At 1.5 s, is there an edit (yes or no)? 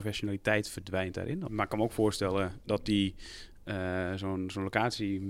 yes